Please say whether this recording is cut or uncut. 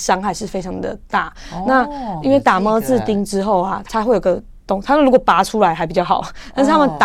cut